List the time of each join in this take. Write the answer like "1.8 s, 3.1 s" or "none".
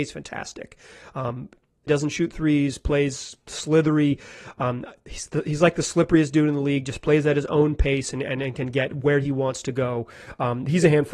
1.9 s